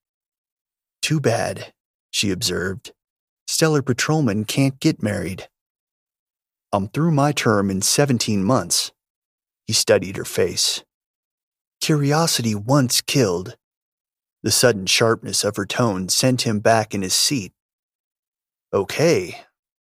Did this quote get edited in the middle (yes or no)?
yes